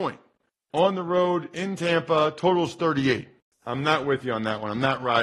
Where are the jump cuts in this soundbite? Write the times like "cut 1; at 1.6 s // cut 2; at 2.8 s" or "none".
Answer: cut 1; at 3.5 s